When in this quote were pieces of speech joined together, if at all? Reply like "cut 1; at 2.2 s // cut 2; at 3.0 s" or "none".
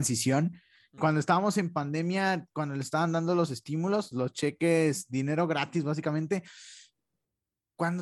cut 1; at 1.0 s // cut 2; at 4.1 s